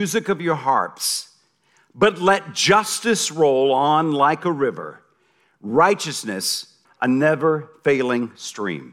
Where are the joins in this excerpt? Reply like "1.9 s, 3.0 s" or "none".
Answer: 6.8 s